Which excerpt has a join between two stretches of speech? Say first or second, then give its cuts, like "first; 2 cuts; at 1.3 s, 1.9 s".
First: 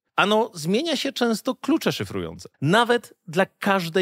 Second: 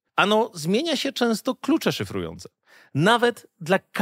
first; 1 cut; at 2.5 s